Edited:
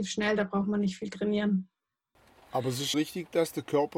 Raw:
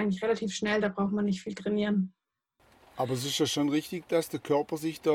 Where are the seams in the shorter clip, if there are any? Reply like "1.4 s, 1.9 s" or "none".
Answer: 2.9 s

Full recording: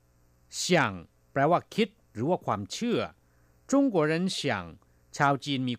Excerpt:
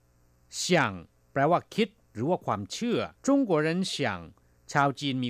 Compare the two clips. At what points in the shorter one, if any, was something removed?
3.2 s

